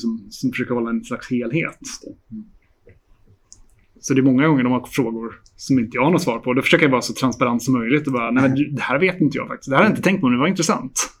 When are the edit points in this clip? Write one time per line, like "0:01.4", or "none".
none